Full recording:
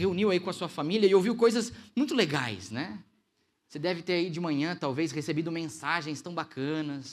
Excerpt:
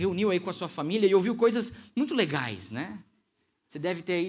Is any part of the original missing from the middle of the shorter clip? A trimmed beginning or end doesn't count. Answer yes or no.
no